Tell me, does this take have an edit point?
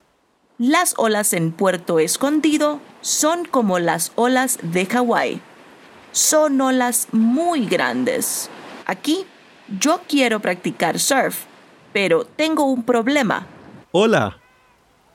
yes; 2 cuts; at 8.8 s, 13.8 s

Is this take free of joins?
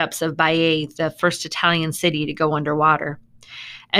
yes; 0 cuts

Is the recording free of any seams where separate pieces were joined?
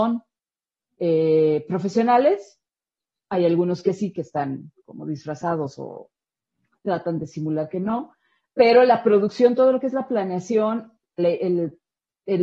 no; 1 cut; at 11.2 s

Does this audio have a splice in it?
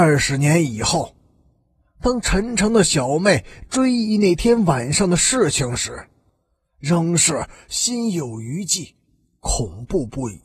no; 0 cuts

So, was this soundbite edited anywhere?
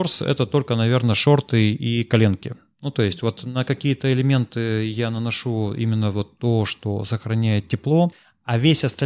no; 0 cuts

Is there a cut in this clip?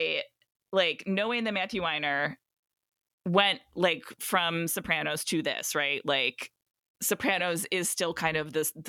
no; 0 cuts

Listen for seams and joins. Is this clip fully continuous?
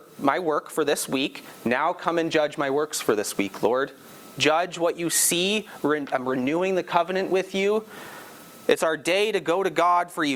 no; 1 cut; at 4.3 s

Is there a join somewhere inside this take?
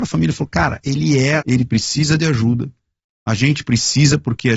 yes; 1 cut; at 1.4 s

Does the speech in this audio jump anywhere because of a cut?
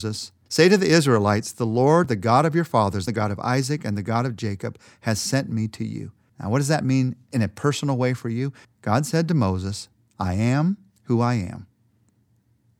yes; 3 cuts; at 3.1 s, 6.3 s, 8.6 s

